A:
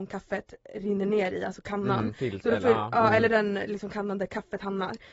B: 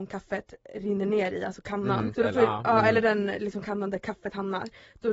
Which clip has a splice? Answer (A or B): B